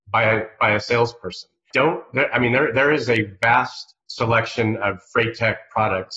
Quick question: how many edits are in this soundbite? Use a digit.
2